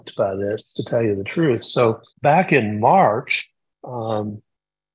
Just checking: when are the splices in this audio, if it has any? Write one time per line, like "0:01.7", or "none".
0:02.1